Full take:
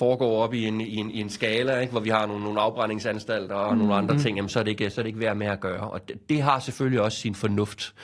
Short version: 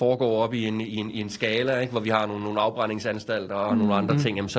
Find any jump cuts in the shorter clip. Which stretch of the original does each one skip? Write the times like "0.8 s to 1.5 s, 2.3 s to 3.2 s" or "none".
none